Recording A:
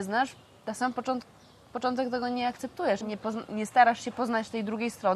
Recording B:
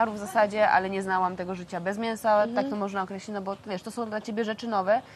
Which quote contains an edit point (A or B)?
A